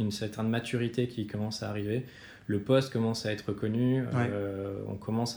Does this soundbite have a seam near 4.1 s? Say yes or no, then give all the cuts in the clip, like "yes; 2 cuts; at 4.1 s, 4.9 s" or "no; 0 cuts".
no; 0 cuts